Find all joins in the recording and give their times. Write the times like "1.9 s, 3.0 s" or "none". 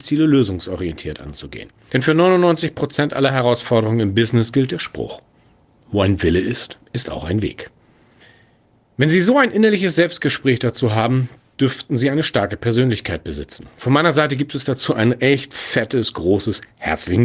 none